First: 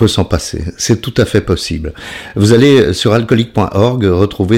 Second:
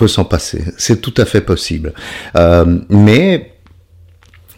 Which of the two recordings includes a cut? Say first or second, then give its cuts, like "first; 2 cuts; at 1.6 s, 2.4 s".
second; 1 cut; at 2.3 s